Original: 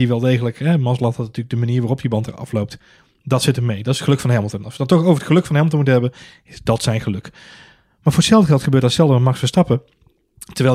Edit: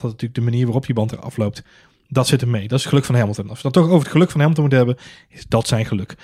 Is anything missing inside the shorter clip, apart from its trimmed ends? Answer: no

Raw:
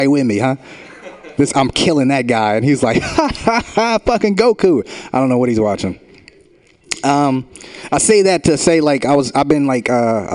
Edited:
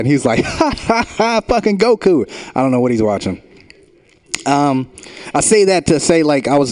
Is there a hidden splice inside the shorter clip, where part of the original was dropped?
no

